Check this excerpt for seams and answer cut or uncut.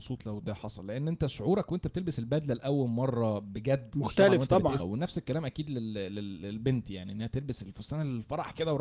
cut